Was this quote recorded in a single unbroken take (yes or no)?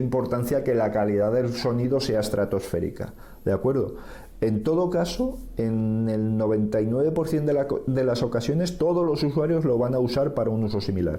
yes